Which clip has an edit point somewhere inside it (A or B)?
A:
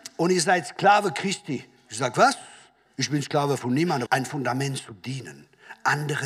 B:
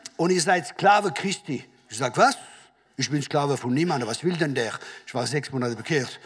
A